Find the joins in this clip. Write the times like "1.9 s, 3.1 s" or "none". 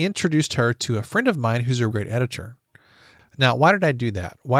1.9 s